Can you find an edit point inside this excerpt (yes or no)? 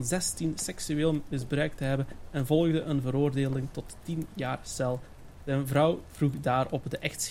no